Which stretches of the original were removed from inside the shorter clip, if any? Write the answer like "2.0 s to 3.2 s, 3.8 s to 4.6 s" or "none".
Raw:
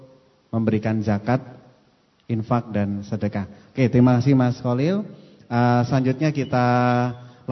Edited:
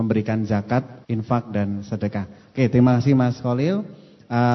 1.6 s to 2.2 s